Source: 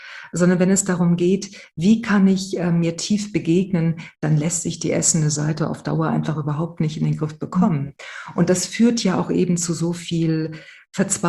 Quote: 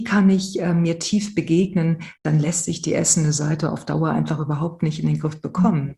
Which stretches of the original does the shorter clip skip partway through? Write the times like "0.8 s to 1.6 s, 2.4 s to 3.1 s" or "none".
none